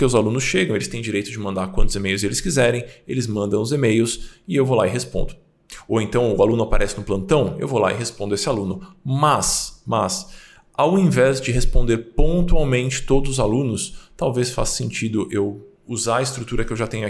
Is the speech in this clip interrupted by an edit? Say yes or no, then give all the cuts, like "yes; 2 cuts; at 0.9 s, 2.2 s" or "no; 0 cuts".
no; 0 cuts